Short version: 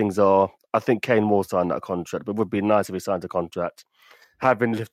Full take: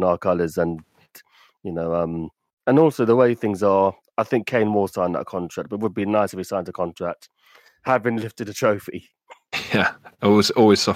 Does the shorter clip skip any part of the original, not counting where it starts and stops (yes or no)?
no